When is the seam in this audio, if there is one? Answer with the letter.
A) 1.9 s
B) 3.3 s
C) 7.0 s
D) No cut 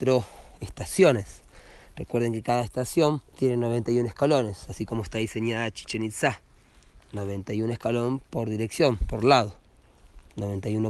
B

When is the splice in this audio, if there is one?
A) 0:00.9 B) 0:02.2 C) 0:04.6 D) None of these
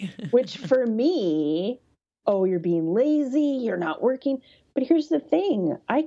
B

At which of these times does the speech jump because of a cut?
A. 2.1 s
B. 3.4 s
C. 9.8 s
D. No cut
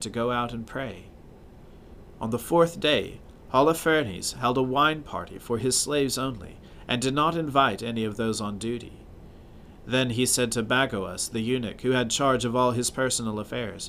A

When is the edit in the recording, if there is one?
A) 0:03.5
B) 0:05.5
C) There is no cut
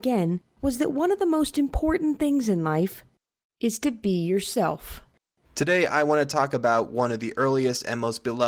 B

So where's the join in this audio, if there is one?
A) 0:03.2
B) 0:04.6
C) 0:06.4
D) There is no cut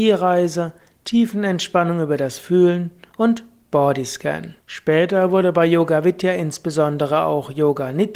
B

